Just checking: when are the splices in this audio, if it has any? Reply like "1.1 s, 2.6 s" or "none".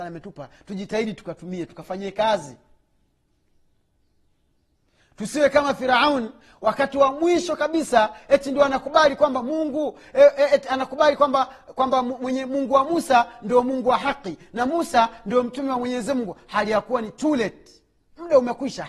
none